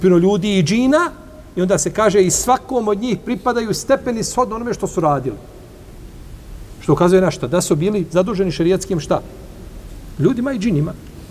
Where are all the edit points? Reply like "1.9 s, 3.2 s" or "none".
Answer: 10.2 s